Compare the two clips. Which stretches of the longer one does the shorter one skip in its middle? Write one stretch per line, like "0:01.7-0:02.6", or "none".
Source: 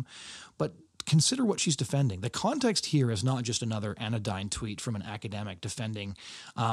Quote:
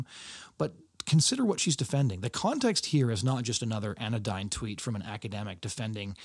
none